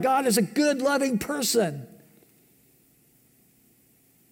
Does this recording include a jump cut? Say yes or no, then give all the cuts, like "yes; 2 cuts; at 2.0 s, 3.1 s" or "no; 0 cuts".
no; 0 cuts